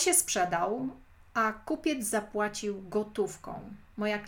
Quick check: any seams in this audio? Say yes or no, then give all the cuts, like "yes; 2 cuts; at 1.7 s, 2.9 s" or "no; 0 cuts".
no; 0 cuts